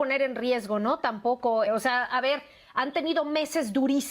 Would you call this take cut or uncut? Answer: cut